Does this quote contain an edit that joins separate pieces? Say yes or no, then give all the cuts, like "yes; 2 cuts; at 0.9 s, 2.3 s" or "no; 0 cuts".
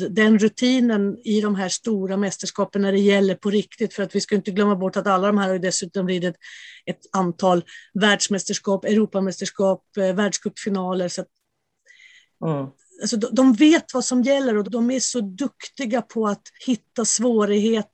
yes; 2 cuts; at 14.6 s, 16.6 s